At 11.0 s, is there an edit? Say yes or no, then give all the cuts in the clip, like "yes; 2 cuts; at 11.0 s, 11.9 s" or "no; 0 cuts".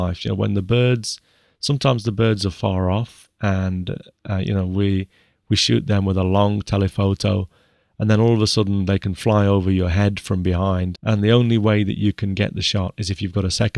yes; 1 cut; at 11.0 s